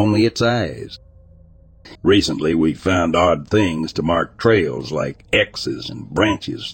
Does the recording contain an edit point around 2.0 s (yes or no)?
yes